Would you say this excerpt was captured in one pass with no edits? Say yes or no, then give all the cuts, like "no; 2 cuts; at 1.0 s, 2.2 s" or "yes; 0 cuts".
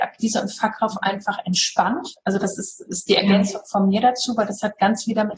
yes; 0 cuts